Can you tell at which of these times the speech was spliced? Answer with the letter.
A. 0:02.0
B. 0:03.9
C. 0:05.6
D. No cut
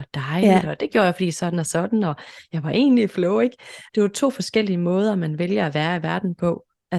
B